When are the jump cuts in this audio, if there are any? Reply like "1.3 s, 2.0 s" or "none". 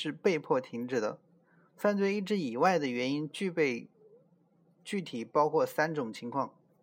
none